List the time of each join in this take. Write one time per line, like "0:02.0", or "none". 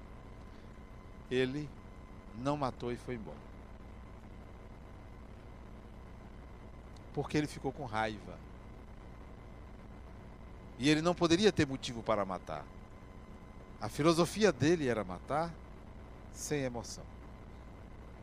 none